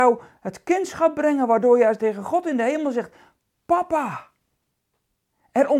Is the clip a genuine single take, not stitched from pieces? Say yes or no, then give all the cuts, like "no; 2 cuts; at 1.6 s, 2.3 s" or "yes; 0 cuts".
no; 1 cut; at 2.0 s